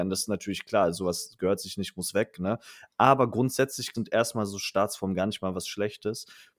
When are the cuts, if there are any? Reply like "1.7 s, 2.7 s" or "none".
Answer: 3.9 s